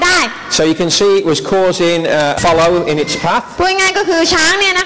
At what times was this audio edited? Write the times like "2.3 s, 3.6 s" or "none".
2.4 s